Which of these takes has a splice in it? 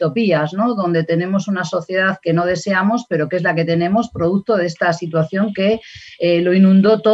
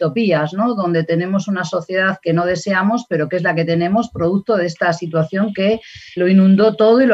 second; 1 cut; at 6.2 s

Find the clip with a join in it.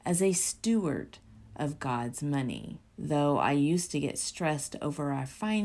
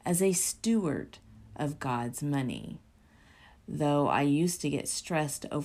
first; 1 cut; at 2.9 s

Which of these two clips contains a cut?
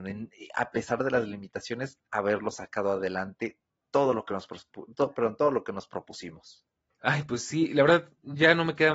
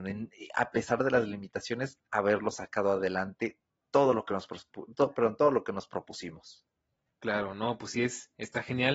first; 1 cut; at 6.9 s

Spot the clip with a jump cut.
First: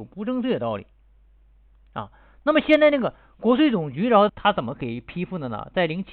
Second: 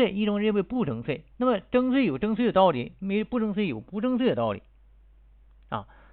first; 1 cut; at 4.3 s

